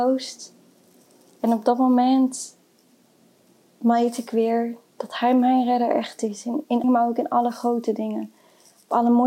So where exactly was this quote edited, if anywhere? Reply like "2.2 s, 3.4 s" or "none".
6.8 s